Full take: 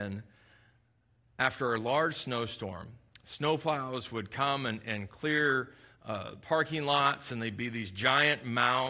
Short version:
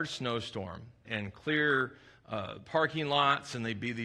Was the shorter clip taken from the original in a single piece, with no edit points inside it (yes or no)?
no